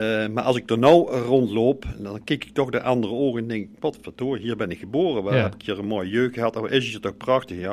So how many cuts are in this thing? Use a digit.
0